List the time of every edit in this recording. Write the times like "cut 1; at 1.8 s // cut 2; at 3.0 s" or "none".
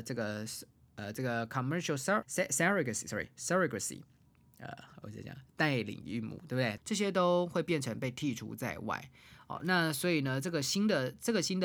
cut 1; at 2.2 s // cut 2; at 6.8 s